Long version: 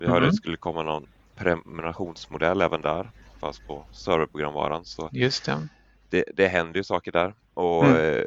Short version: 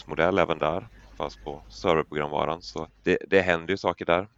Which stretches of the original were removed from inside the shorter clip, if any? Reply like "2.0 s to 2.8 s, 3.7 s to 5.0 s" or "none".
5.1 s to 5.9 s